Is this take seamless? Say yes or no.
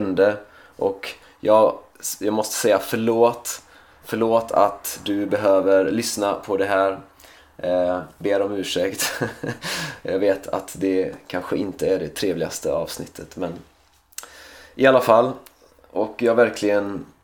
yes